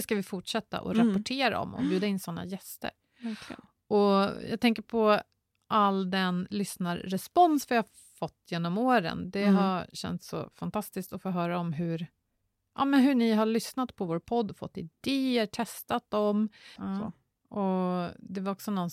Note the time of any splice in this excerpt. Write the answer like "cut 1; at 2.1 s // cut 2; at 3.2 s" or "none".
cut 1; at 16.8 s